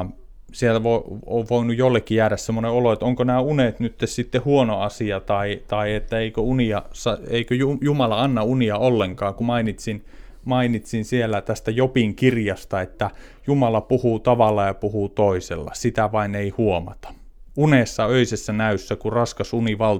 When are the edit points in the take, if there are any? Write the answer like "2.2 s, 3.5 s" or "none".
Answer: none